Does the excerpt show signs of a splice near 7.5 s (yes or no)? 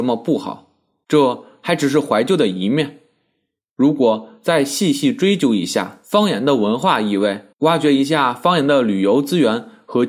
yes